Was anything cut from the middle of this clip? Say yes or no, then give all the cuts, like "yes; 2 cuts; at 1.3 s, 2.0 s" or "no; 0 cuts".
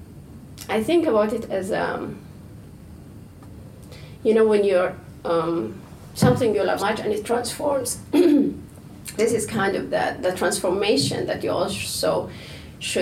yes; 2 cuts; at 6.8 s, 9.2 s